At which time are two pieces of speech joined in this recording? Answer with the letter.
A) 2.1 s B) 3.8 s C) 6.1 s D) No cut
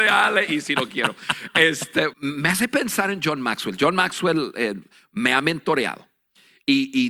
A